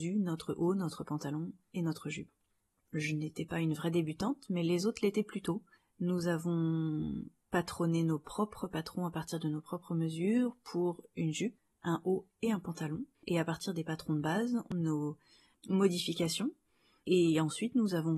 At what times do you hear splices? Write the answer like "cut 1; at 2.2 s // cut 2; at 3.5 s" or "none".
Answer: cut 1; at 2.8 s // cut 2; at 13.1 s // cut 3; at 14.7 s

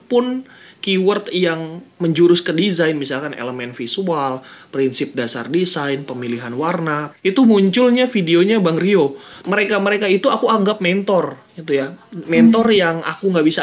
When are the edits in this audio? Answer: cut 1; at 7.1 s // cut 2; at 9.4 s

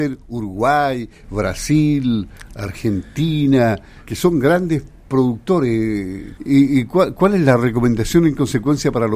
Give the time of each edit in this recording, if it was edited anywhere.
cut 1; at 4.0 s // cut 2; at 6.4 s

